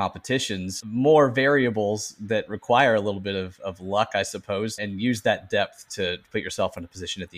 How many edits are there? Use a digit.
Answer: 1